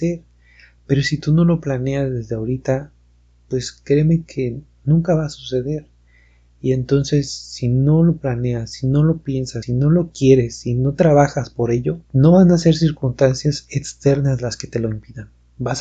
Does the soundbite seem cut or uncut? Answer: cut